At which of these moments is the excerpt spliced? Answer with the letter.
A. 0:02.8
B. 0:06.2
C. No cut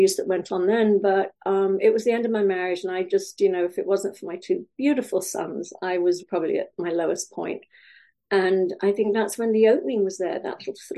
B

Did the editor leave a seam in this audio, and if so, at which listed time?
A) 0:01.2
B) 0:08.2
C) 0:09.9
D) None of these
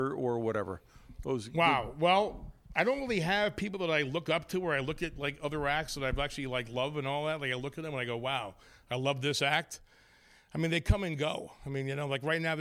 D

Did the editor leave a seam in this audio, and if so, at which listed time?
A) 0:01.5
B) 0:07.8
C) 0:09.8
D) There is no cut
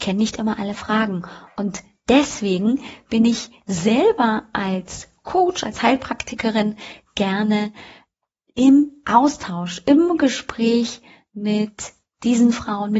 D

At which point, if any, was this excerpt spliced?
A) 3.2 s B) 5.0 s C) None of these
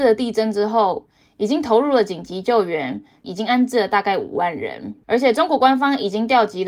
A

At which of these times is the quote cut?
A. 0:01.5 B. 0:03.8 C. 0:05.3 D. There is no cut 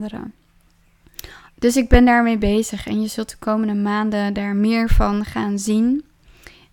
A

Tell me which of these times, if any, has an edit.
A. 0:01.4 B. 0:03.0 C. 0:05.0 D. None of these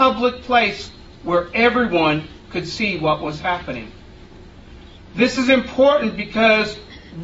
C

